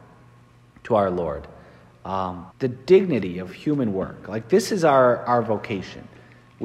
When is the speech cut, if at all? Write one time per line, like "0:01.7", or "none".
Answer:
0:02.5